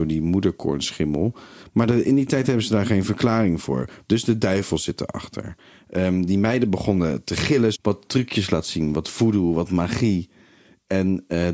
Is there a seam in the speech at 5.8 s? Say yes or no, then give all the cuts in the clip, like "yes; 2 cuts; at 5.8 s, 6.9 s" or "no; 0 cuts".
no; 1 cut; at 7.7 s